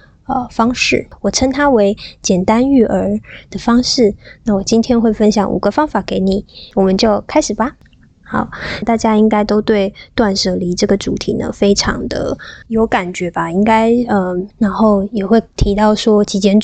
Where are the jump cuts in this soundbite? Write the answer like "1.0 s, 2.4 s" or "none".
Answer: 8.8 s, 12.6 s, 14.5 s

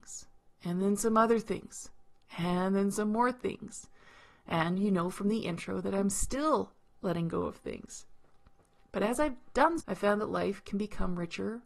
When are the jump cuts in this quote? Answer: 9.8 s

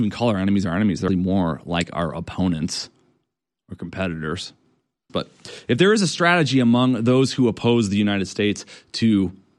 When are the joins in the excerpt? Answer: 1.1 s, 5.1 s

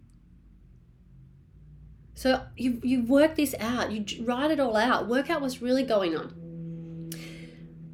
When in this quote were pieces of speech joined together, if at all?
none

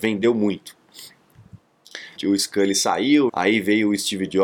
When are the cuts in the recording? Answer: 2.2 s, 3.3 s

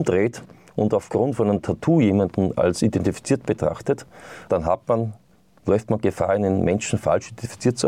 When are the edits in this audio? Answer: 4.5 s

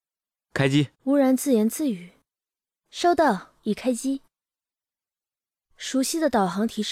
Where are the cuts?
0.9 s

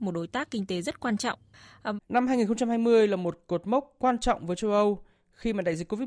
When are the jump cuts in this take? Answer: 2.0 s

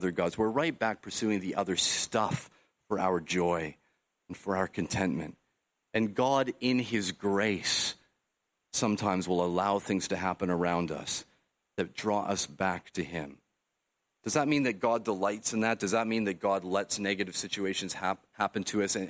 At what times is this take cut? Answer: none

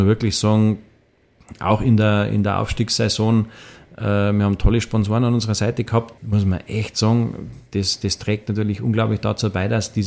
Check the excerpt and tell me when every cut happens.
6.2 s

